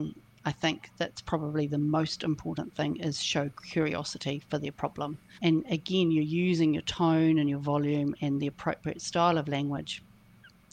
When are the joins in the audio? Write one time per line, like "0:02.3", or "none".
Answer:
0:05.4